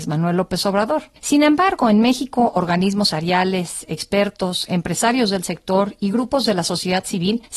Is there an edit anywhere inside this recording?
yes; 1 cut; at 3.1 s

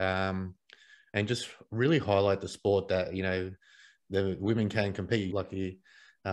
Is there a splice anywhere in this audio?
yes; 1 cut; at 5.3 s

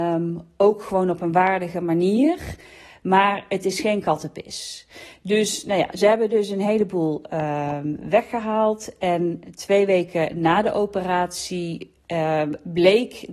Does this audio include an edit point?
no; 0 cuts

